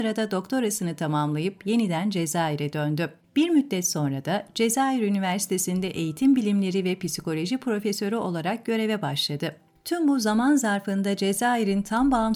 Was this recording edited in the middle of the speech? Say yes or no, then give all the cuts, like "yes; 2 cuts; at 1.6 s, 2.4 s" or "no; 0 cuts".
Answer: no; 0 cuts